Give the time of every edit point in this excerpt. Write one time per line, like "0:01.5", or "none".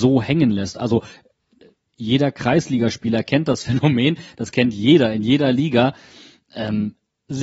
none